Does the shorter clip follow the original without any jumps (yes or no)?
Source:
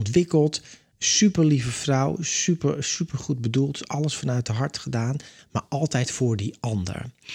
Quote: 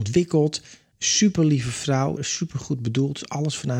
no